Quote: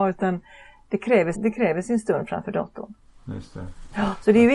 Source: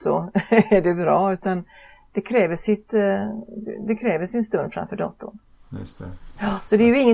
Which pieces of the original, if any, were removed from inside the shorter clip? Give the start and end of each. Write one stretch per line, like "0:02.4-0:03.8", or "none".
0:02.6-0:03.8